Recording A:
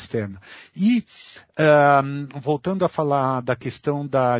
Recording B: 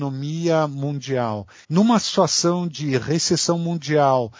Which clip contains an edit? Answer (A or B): B